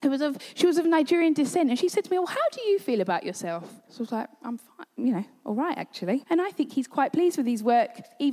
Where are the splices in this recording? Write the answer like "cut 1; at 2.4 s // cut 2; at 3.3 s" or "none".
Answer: cut 1; at 3.9 s // cut 2; at 6.2 s